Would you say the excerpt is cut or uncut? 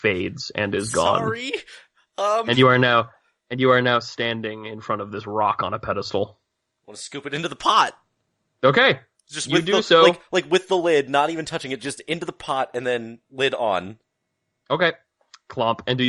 uncut